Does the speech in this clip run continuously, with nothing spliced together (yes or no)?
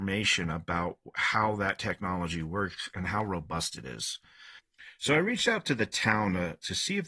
yes